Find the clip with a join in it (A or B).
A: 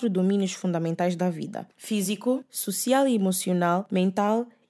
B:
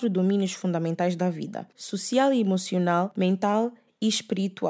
B